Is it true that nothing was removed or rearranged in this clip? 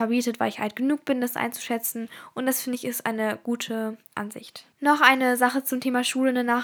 no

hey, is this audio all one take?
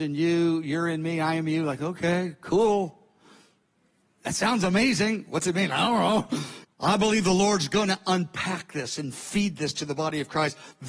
no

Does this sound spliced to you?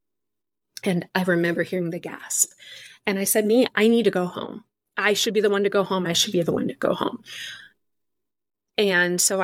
yes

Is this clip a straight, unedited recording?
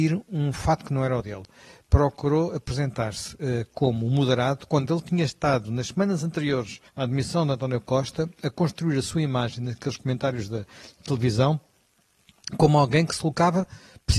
no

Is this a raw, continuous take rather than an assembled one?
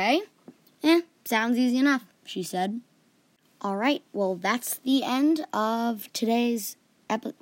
yes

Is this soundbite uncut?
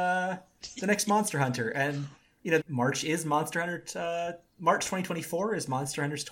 no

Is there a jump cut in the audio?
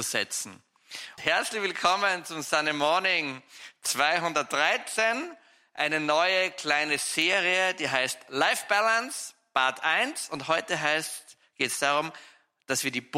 yes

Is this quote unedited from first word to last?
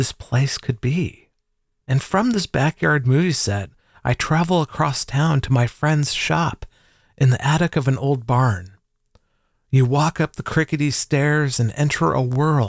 yes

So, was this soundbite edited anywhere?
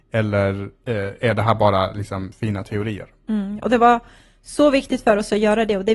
no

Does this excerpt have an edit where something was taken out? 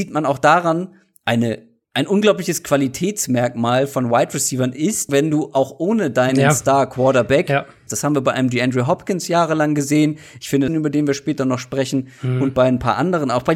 yes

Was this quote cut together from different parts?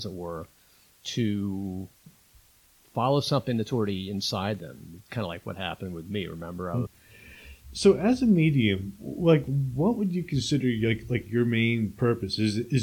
yes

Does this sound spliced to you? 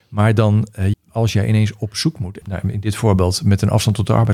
yes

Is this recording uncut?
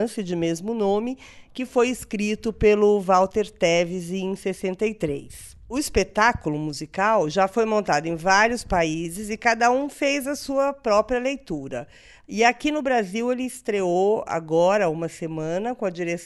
yes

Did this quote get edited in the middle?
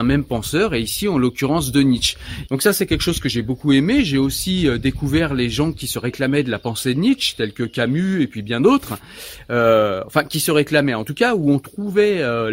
yes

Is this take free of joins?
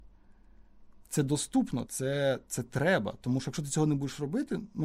no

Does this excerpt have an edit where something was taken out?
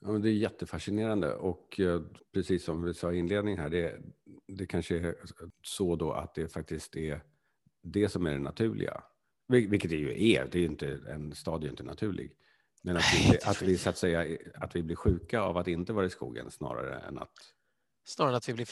no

